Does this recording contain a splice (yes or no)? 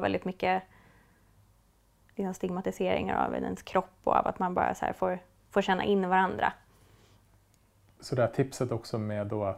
no